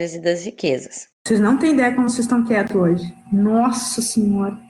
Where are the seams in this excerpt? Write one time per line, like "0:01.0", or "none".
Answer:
0:01.1